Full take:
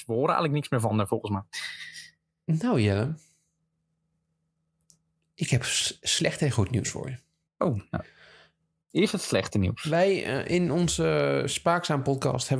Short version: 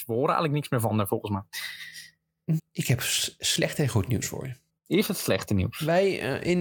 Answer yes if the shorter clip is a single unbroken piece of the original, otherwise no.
no